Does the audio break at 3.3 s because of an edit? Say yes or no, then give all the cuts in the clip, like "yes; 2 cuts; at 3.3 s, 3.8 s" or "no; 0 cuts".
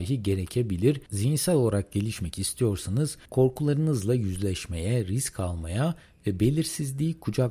yes; 1 cut; at 3.3 s